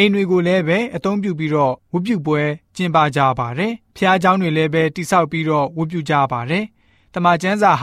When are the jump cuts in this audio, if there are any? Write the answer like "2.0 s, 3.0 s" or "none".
3.9 s